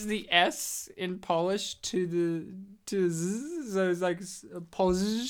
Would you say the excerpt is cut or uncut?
uncut